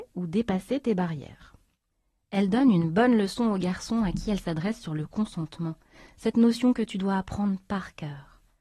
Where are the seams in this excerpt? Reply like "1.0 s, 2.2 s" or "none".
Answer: none